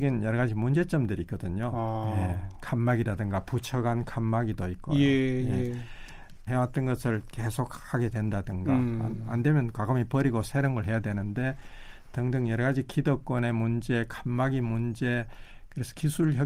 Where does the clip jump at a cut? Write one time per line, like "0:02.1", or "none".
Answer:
0:06.5